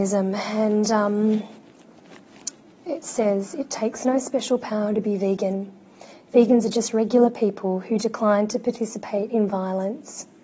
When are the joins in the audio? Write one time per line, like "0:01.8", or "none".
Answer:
none